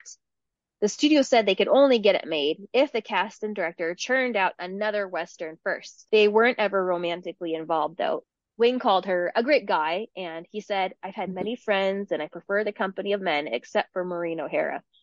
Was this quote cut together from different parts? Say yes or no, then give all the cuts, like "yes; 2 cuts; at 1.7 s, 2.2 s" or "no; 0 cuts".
yes; 1 cut; at 6.1 s